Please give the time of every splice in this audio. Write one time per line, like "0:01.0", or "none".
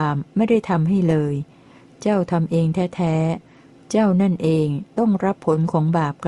none